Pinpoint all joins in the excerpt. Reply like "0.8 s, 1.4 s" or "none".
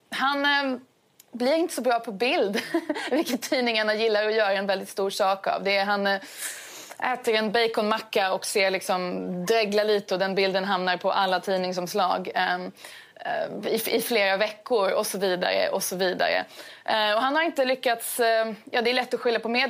none